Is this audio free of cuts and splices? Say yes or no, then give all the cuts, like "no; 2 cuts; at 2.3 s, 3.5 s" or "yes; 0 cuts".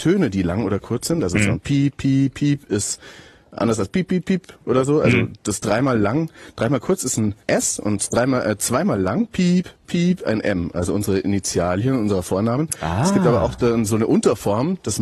no; 1 cut; at 7.4 s